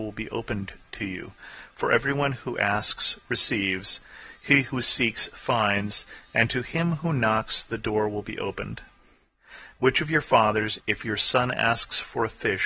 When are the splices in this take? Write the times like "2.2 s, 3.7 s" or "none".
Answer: none